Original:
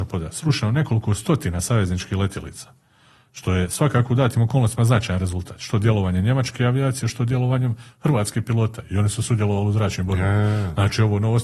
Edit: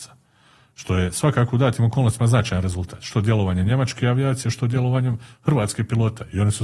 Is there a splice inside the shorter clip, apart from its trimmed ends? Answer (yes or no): no